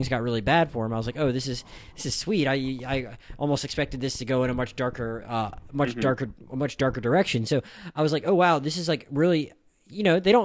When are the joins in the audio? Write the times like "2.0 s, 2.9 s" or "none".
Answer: none